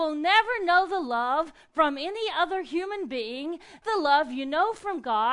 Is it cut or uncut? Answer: cut